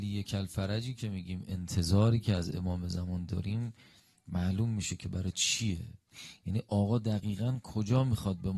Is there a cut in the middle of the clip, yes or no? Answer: no